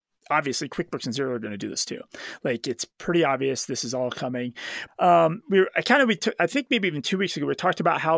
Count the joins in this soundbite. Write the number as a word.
one